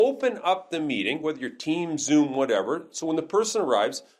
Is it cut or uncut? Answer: uncut